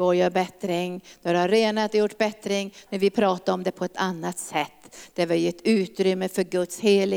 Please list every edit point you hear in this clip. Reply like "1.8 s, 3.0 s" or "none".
2.9 s